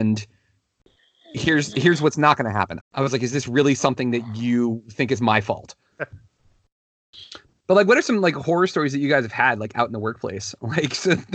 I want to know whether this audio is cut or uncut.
cut